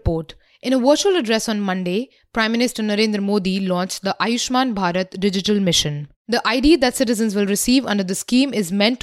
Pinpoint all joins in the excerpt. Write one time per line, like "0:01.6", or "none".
0:06.1